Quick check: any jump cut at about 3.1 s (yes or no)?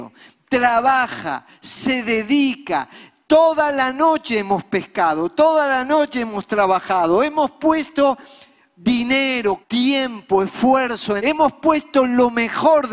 no